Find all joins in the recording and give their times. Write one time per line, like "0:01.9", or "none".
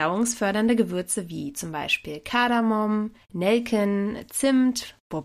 0:03.2